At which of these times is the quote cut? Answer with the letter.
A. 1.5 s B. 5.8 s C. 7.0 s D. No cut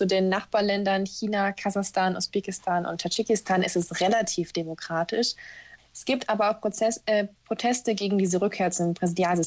B